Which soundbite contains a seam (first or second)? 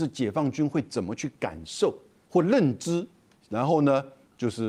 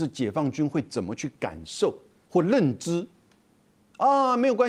first